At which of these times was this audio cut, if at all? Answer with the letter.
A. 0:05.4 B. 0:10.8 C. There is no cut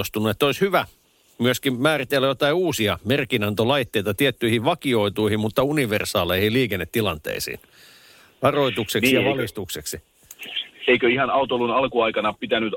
C